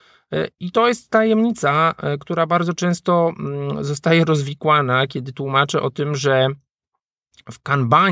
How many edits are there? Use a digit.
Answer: 0